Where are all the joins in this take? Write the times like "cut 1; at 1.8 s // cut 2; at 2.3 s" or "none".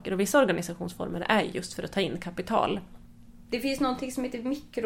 none